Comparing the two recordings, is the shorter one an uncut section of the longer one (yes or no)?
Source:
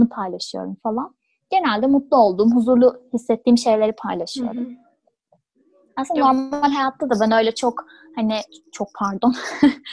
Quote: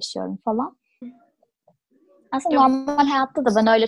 no